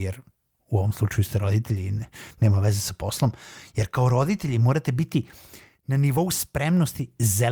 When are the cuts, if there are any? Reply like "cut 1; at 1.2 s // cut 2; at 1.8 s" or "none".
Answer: none